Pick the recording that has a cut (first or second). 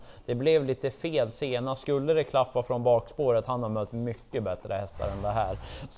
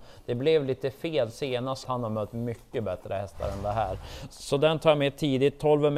second